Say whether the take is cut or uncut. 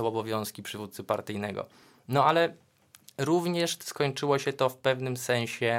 uncut